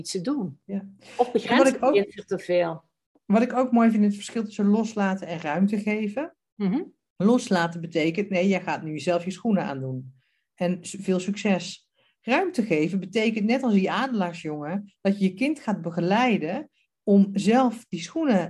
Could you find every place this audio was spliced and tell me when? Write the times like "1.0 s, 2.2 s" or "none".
none